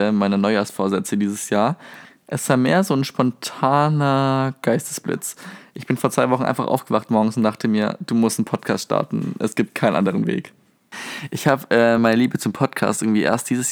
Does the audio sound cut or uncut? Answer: uncut